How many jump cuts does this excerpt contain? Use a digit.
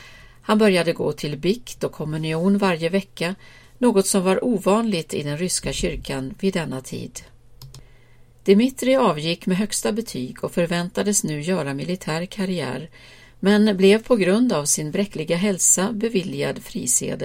0